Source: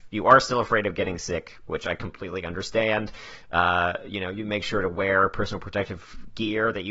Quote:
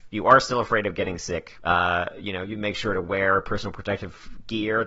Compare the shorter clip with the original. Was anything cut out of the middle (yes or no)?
yes